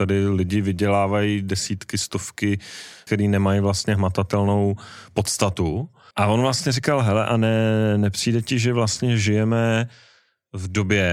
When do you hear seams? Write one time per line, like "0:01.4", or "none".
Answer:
0:03.1
0:06.1